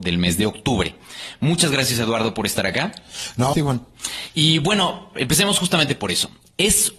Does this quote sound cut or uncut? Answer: cut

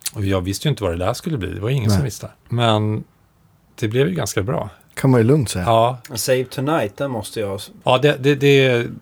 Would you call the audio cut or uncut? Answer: cut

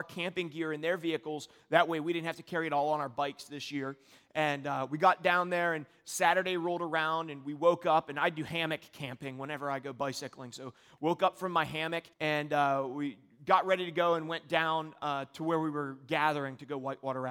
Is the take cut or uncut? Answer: cut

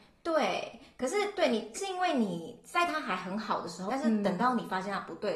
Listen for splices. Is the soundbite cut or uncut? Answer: cut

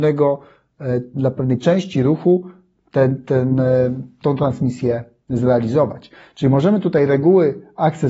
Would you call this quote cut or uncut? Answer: uncut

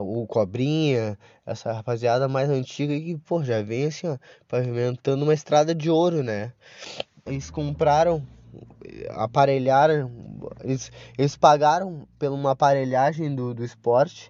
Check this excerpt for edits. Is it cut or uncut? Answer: cut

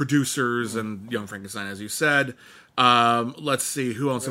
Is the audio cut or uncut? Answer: uncut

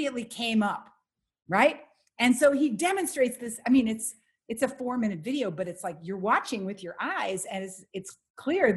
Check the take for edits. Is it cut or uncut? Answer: uncut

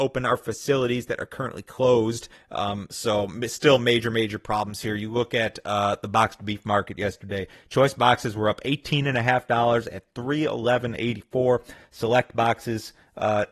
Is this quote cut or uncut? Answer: cut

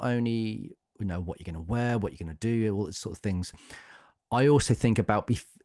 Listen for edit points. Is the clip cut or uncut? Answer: uncut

